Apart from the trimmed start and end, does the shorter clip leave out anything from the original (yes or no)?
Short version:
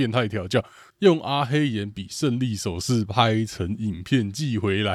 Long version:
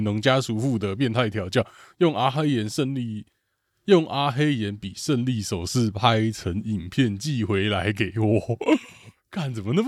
yes